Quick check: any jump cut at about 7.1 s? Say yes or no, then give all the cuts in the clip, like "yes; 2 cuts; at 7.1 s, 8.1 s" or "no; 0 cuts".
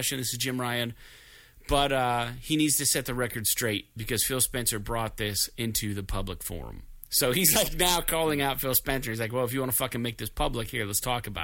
no; 0 cuts